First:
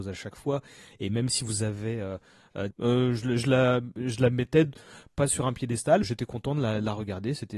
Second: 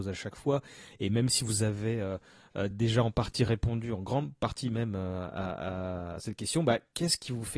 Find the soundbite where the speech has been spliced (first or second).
first